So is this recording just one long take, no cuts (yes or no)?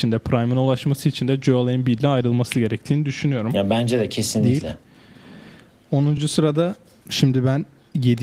yes